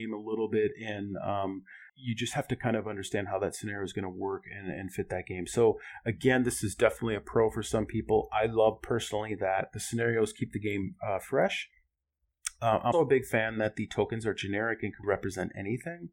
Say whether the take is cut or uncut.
cut